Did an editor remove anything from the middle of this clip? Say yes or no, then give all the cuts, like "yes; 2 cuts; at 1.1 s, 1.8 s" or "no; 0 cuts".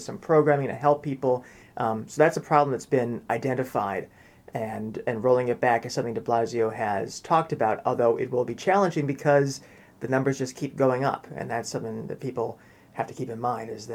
yes; 1 cut; at 1.6 s